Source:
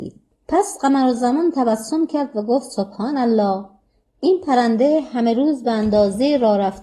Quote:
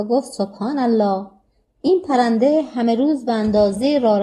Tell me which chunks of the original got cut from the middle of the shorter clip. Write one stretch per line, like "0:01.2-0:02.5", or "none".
none